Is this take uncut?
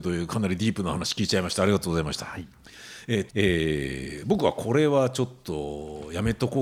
no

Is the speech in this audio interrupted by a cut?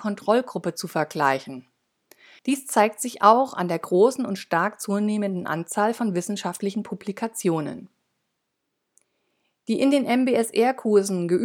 yes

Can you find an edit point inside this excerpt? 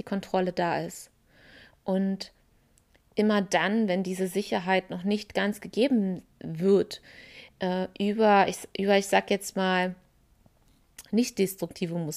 no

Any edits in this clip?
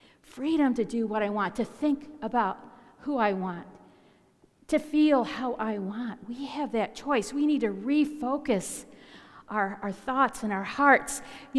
no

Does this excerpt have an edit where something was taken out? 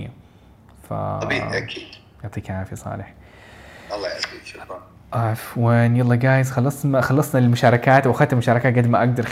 no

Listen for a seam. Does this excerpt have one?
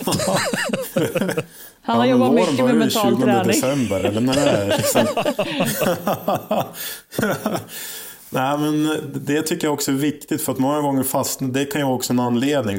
no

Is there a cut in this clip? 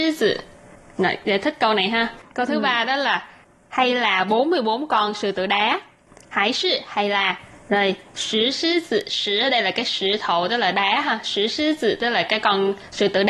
no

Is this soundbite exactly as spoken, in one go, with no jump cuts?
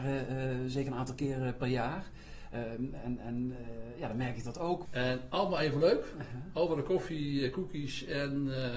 no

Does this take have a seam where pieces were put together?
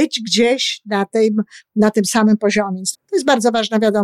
yes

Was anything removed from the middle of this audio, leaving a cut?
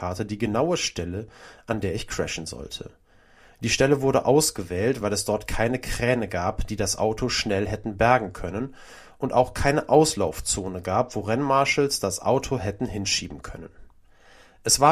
no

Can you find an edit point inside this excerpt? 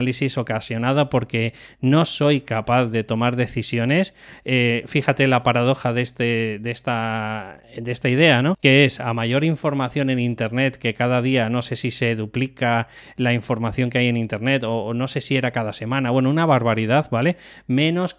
no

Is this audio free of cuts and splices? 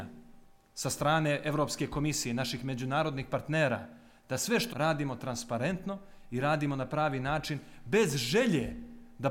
no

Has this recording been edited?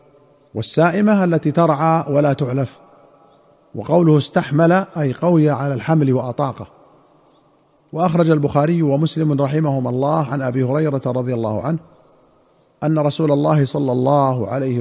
no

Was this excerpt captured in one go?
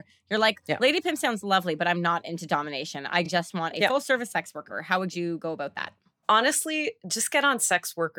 yes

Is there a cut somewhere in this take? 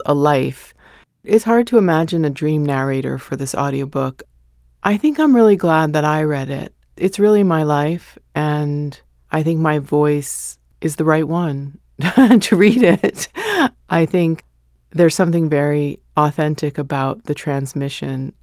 yes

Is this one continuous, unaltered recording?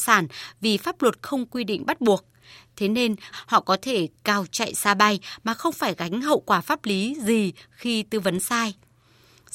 no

